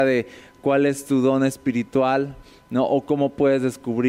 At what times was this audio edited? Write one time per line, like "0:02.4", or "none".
none

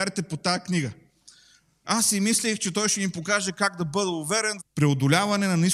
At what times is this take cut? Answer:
0:01.8
0:04.6

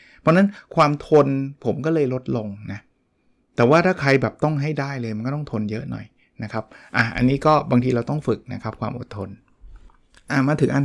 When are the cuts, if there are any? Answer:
none

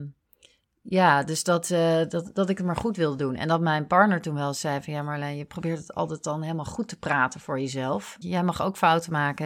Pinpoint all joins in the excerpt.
0:08.2

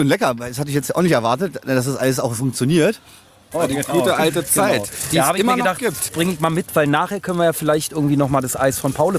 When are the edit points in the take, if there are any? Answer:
0:03.5
0:06.1

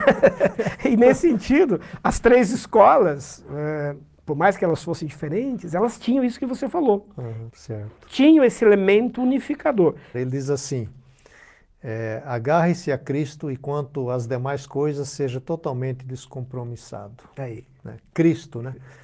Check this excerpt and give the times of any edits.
0:07.5
0:10.1

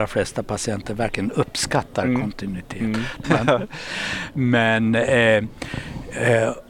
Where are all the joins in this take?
0:03.2

